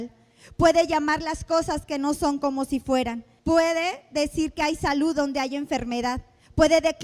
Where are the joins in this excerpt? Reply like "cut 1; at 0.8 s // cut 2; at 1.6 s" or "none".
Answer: cut 1; at 3.4 s